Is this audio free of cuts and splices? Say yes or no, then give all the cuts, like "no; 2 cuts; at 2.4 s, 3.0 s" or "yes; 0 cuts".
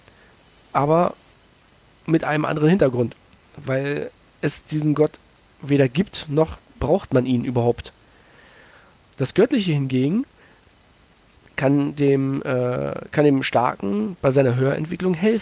yes; 0 cuts